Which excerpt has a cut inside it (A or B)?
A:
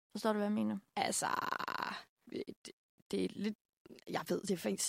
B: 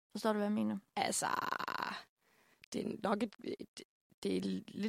A